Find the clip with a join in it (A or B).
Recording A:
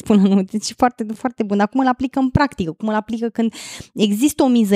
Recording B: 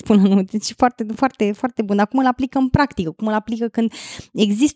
A